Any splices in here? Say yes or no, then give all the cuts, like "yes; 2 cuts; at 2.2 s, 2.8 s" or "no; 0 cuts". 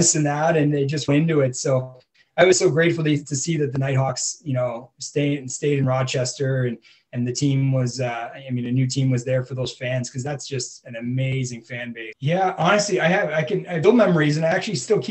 yes; 3 cuts; at 1.1 s, 12.1 s, 13.8 s